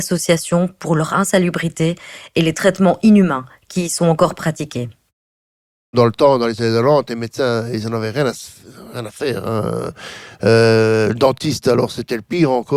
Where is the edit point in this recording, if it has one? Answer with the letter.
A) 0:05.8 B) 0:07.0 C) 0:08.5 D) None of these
D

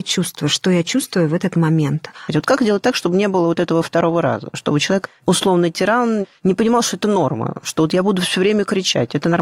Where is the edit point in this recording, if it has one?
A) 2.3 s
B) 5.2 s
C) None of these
A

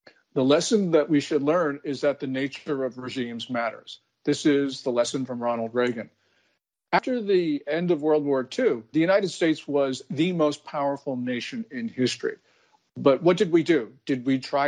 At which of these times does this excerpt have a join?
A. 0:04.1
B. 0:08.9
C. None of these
B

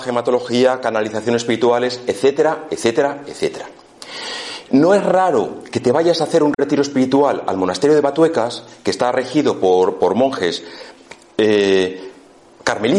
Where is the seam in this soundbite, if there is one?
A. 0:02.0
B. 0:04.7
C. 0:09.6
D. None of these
B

